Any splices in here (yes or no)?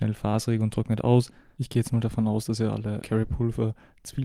yes